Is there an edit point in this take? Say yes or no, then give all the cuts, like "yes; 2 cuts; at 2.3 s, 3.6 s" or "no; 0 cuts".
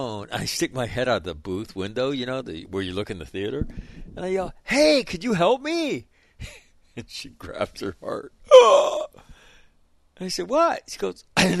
no; 0 cuts